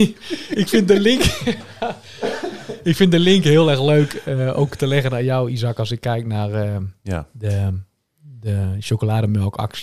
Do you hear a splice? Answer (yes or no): no